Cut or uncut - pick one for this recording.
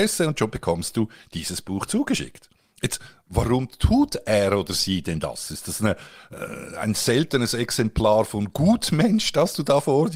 uncut